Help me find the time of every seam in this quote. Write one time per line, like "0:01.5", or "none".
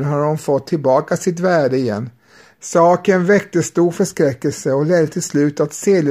0:02.6